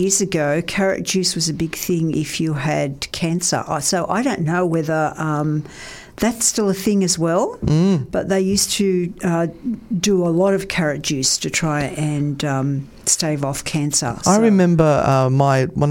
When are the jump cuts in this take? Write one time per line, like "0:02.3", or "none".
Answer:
none